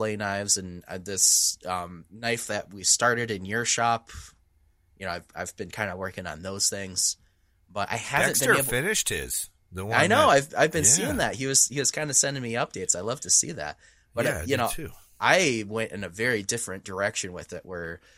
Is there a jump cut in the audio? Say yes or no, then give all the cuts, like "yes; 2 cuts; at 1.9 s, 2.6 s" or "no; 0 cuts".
no; 0 cuts